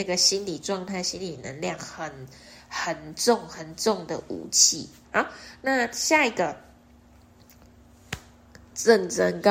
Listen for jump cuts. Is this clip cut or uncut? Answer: cut